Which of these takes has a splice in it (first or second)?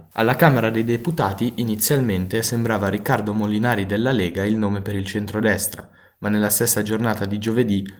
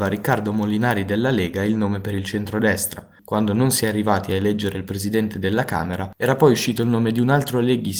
second